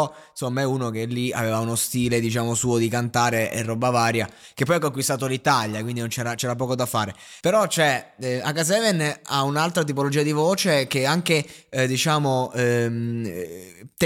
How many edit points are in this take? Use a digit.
1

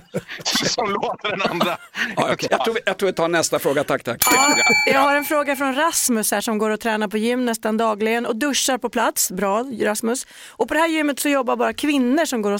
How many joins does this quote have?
1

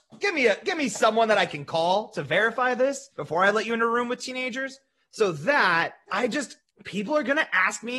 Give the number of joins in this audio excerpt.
1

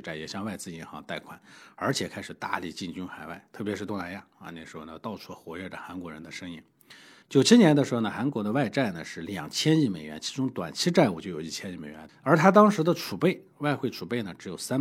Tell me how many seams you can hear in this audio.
2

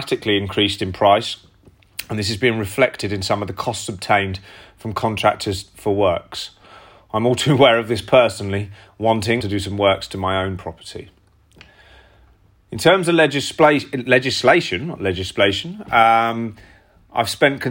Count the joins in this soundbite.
1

